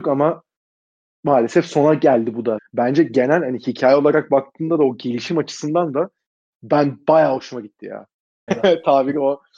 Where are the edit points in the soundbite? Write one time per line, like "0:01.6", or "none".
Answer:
0:02.6
0:08.5